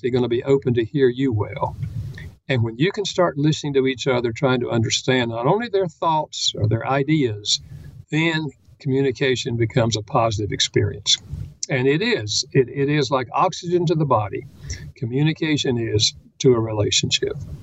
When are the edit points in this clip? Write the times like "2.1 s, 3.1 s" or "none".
8.0 s